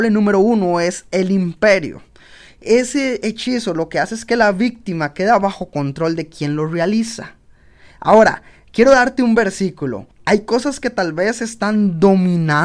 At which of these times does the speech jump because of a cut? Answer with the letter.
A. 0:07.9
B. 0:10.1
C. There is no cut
B